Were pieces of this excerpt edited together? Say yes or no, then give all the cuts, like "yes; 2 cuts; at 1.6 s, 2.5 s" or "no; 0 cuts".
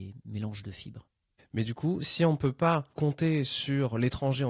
no; 0 cuts